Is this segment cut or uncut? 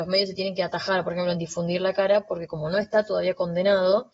uncut